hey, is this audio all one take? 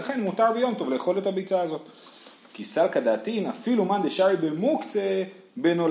no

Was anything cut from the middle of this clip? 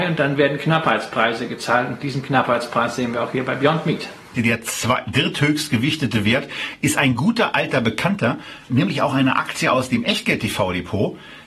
yes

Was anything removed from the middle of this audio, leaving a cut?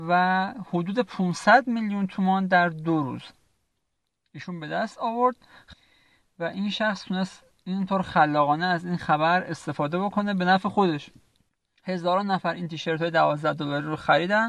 no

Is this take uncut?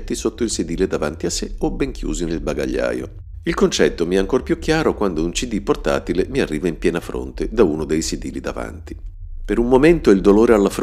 yes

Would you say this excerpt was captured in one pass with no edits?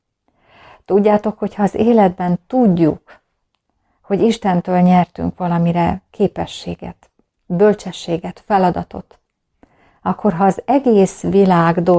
yes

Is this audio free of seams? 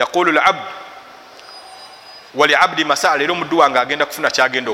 no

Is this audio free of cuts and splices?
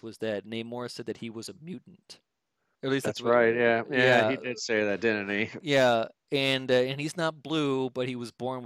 no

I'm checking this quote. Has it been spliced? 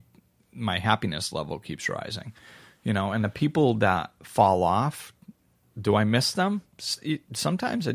no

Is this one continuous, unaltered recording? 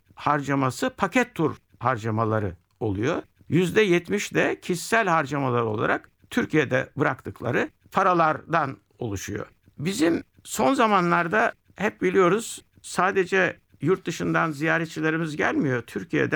yes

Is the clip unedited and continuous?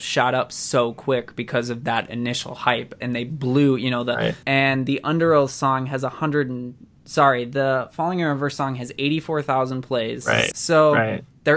no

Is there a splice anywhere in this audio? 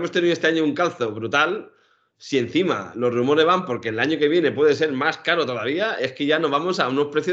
no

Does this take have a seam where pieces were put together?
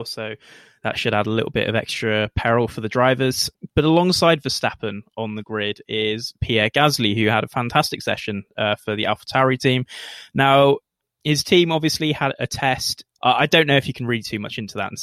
yes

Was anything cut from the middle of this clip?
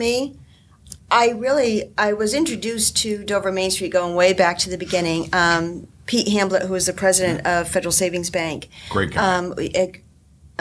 yes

